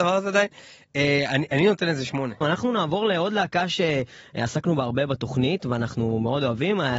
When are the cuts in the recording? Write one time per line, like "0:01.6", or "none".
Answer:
0:02.4